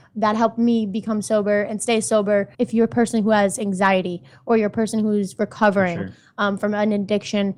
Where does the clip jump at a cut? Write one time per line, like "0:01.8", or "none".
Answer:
0:02.5